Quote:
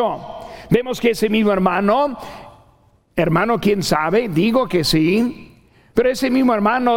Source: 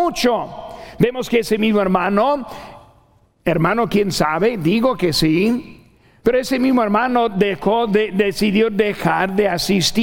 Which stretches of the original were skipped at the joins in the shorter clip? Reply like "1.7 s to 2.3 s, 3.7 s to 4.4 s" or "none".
none